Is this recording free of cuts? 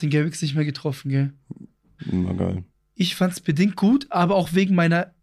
no; 1 cut; at 2.0 s

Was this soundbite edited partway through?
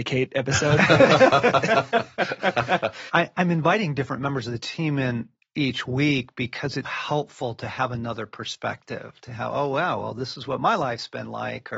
yes; 2 cuts; at 3.1 s, 6.8 s

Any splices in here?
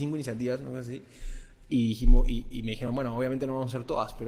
no; 0 cuts

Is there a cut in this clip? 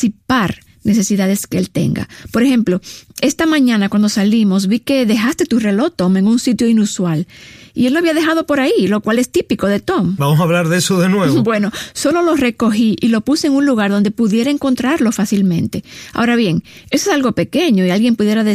no; 0 cuts

